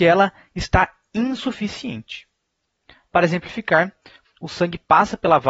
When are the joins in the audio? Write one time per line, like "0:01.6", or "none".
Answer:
0:04.2